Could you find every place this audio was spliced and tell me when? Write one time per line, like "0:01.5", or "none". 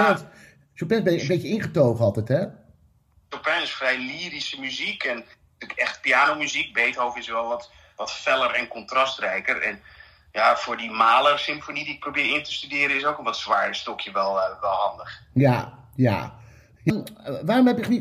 none